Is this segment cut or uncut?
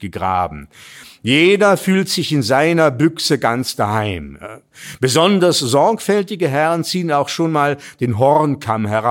uncut